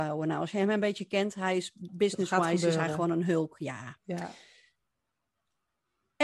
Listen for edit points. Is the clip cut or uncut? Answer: uncut